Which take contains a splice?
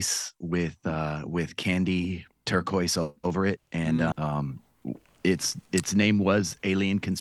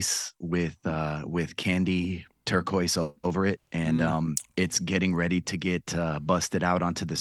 first; 1 cut; at 4.1 s

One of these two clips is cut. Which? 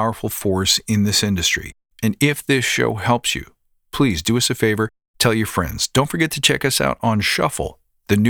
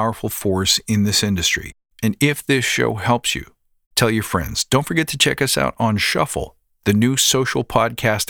second; 1 cut; at 3.8 s

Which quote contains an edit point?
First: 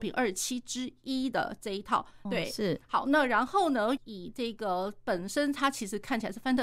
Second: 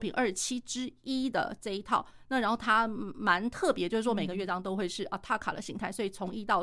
first; 2 cuts; at 2.3 s, 4.0 s

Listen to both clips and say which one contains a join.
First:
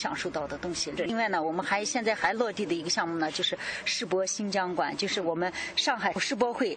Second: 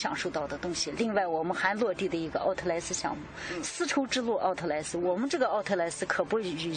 first; 1 cut; at 1.0 s

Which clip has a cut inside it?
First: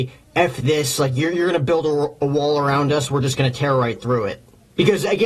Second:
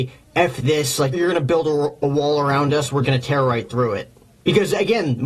second; 2 cuts; at 1.1 s, 3.0 s

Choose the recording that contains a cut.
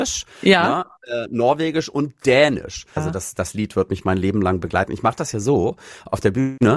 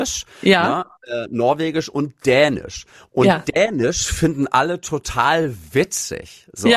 first; 1 cut; at 3.0 s

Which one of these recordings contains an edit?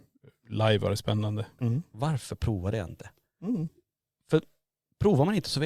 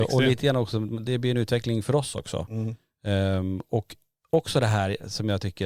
first; 1 cut; at 1.6 s

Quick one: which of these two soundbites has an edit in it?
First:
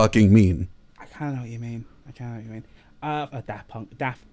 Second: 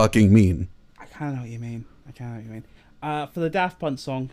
first; 1 cut; at 3.3 s

